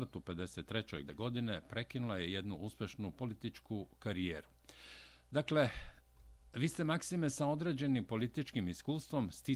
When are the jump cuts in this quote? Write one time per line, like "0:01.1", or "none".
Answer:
0:01.1